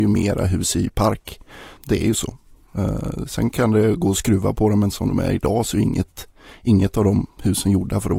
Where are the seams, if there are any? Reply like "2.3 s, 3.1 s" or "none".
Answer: 1.8 s